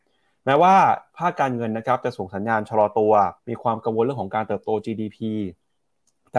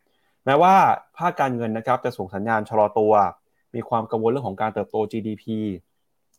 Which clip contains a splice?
first; 1 cut; at 3.4 s

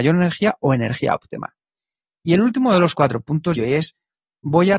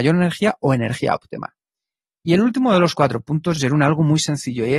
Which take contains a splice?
first; 1 cut; at 3.6 s

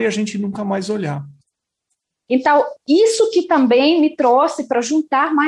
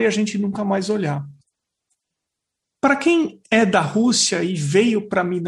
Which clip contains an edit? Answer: first; 1 cut; at 2.3 s

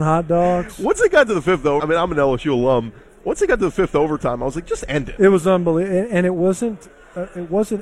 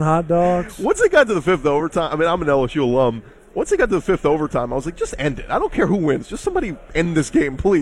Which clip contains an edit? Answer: first; 2 cuts; at 1.8 s, 5.2 s

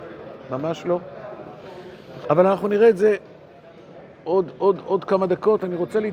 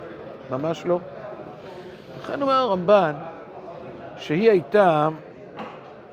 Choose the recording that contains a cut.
first; 1 cut; at 2.2 s

